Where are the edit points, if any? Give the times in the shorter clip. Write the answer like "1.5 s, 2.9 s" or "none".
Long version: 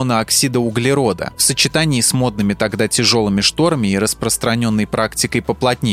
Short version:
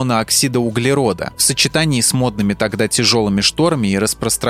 none